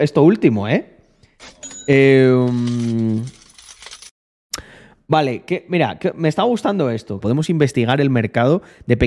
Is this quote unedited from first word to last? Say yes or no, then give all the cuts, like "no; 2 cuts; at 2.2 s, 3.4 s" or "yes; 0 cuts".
no; 1 cut; at 7.2 s